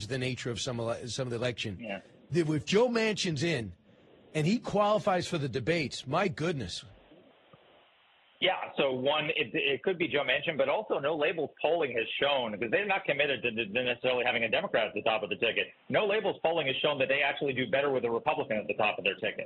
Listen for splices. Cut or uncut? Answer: uncut